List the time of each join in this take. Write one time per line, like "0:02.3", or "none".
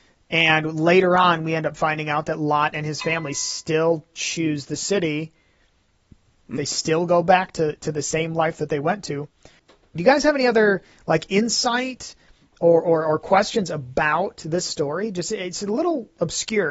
0:06.6
0:10.0